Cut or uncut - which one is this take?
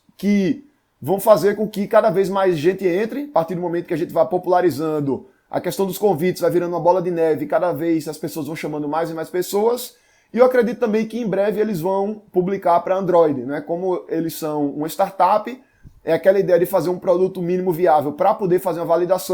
uncut